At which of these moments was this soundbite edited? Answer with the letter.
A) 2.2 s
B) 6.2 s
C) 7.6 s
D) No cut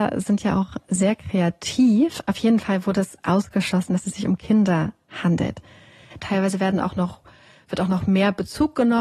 B